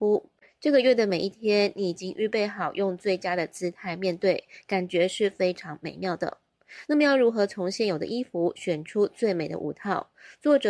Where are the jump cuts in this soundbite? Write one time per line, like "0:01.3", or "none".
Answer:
none